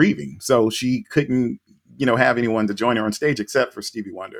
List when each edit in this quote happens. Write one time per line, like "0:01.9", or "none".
none